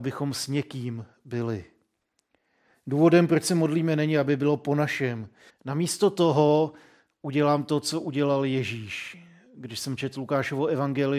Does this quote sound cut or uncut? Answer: cut